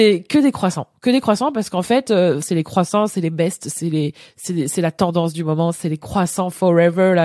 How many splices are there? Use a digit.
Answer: 1